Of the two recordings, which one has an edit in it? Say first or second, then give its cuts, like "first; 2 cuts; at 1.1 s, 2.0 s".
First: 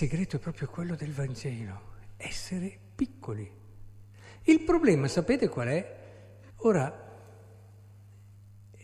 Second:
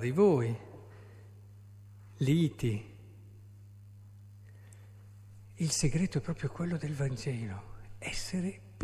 first; 1 cut; at 6.5 s